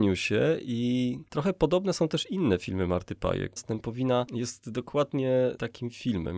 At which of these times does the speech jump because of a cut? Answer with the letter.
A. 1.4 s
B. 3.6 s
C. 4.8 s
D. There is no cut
B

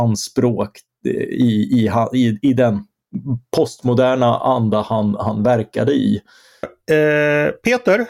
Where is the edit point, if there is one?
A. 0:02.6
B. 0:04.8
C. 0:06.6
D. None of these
C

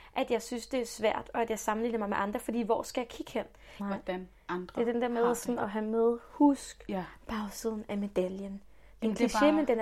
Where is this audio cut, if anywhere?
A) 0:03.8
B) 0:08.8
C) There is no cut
A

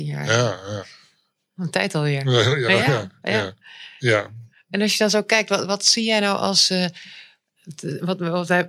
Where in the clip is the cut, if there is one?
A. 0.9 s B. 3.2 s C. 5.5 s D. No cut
D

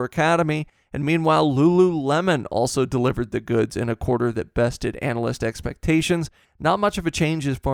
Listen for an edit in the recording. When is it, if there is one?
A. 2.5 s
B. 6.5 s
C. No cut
B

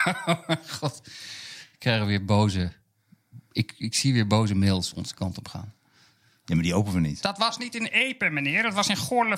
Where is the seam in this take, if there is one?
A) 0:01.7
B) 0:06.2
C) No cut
C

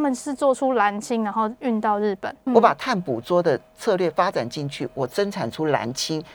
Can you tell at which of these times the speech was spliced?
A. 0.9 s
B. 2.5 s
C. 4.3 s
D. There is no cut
B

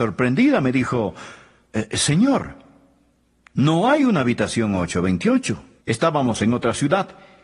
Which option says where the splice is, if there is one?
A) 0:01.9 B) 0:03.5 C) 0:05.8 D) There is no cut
C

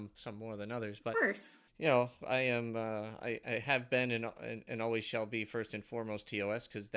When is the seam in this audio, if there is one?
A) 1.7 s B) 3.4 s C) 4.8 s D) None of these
A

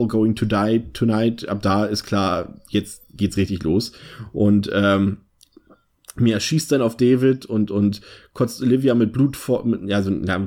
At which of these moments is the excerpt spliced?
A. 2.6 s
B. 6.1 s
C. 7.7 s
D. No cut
D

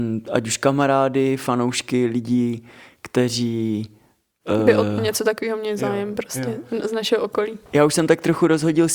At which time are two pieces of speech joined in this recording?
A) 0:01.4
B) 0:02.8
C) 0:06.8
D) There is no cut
D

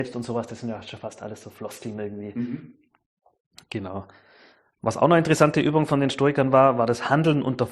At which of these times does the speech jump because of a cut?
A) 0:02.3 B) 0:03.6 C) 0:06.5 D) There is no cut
D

